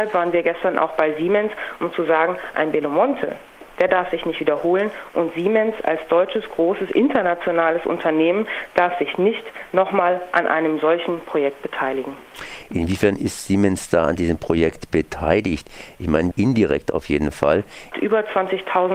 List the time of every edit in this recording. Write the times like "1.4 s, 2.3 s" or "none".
16.3 s, 17.9 s